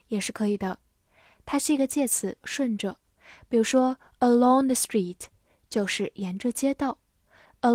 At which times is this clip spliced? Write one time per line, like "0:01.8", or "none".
0:02.4